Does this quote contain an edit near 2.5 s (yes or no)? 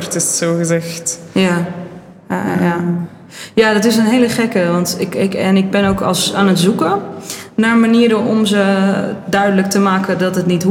no